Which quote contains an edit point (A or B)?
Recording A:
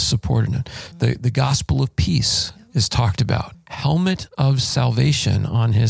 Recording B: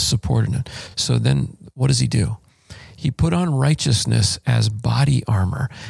A